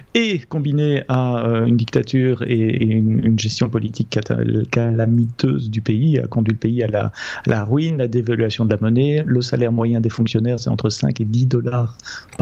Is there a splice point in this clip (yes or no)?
no